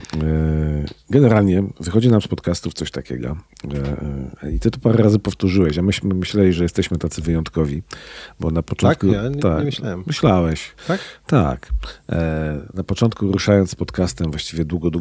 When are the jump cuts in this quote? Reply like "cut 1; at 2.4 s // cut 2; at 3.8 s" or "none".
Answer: none